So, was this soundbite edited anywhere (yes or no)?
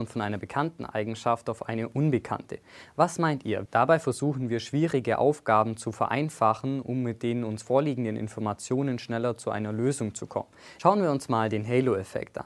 yes